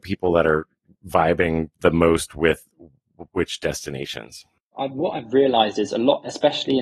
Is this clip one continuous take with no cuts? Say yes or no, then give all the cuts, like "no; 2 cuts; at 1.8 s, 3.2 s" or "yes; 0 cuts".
no; 1 cut; at 4.7 s